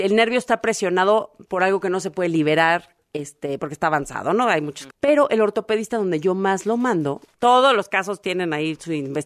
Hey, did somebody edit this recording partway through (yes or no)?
yes